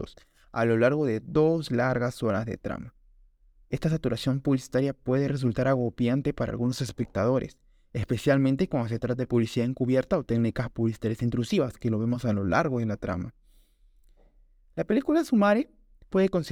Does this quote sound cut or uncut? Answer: uncut